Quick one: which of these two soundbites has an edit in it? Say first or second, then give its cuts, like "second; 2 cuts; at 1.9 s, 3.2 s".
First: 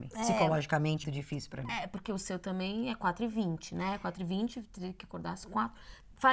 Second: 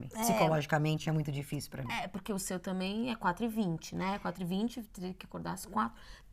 first; 1 cut; at 1.0 s